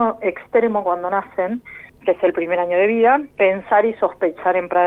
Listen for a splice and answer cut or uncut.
cut